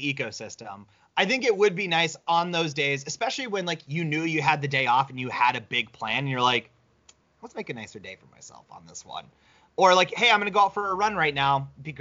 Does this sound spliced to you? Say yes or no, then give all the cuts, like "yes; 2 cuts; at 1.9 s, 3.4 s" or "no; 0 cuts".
no; 0 cuts